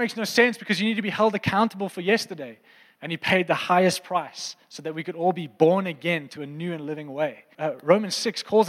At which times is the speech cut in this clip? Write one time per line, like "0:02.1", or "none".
0:03.0
0:07.5